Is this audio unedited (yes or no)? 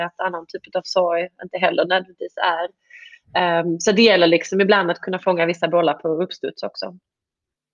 yes